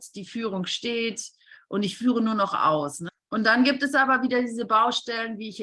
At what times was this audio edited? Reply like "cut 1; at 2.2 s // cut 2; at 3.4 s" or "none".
cut 1; at 3.1 s